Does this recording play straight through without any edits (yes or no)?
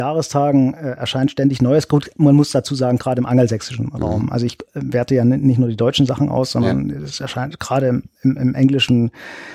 yes